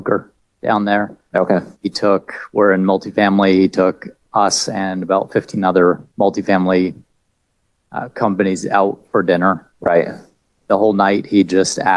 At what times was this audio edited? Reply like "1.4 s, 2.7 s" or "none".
1.8 s